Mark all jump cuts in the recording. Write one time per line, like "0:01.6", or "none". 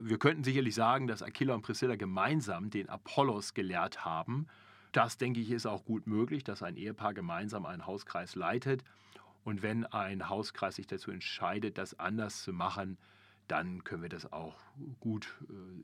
0:04.9
0:09.3